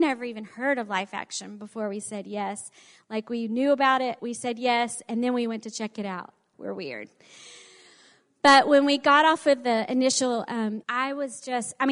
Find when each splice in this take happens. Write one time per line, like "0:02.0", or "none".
0:04.2
0:06.5
0:10.8